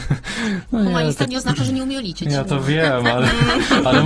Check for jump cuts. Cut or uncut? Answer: uncut